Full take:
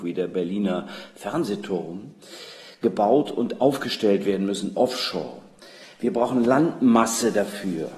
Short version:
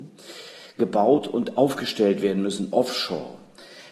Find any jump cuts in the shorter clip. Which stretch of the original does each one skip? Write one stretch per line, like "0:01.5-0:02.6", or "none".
none